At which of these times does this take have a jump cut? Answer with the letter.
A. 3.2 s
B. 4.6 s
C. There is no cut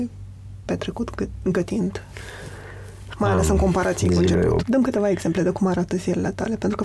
B